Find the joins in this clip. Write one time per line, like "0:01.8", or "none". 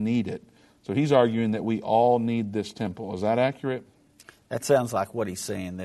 none